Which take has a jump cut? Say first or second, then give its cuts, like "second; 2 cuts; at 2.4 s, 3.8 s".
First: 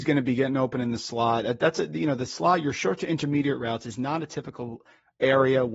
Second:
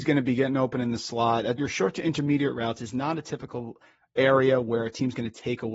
second; 1 cut; at 1.6 s